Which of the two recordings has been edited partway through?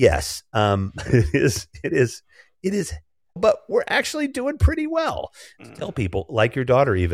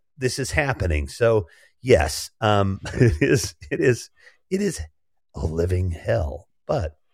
first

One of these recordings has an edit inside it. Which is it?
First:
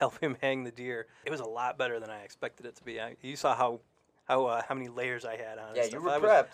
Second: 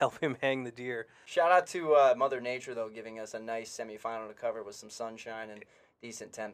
first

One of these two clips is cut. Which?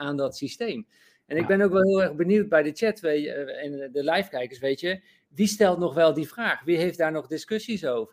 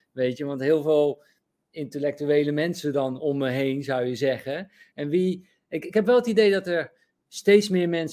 second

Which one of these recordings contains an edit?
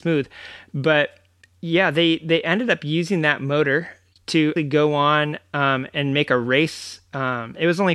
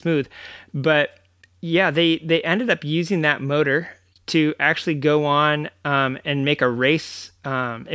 first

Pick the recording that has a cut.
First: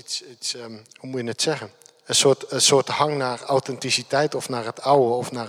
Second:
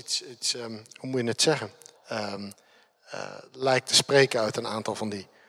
second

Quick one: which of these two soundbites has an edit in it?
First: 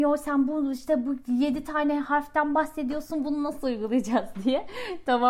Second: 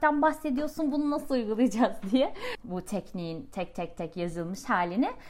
second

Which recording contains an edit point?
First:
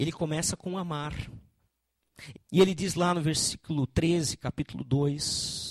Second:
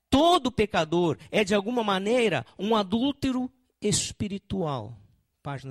first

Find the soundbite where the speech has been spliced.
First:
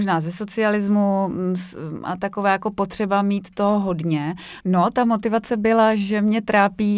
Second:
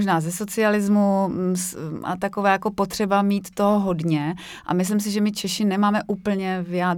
first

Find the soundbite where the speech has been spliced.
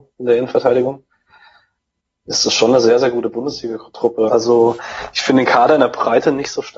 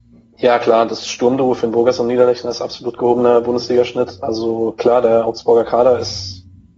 first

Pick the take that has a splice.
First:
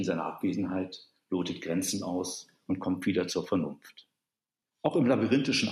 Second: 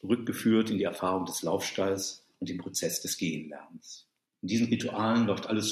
second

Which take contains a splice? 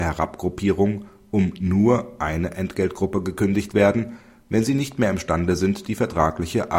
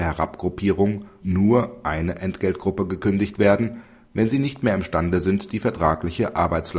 second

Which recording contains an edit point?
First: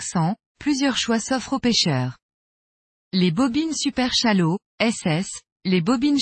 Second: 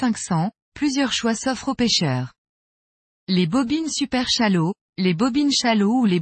second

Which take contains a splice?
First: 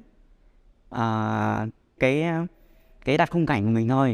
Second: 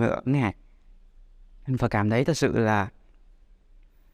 first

